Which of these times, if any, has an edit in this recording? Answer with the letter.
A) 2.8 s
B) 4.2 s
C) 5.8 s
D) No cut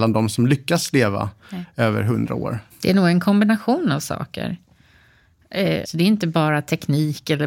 C